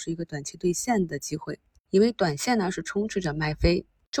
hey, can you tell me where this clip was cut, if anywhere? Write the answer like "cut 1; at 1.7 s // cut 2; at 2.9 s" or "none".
none